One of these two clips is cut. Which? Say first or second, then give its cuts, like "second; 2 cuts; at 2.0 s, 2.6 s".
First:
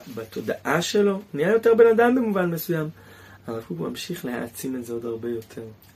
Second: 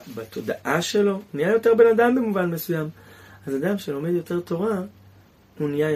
first; 1 cut; at 3.4 s